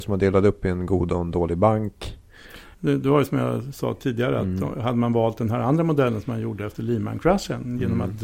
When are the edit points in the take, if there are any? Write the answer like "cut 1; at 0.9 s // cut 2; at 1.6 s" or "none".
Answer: cut 1; at 2.7 s